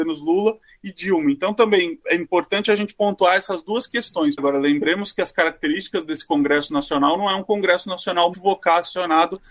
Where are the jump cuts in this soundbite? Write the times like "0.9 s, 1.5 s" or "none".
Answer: 2.0 s, 4.4 s, 8.3 s